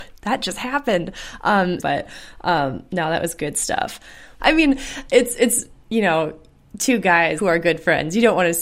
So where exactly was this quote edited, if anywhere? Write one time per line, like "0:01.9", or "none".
0:01.8
0:04.4
0:07.4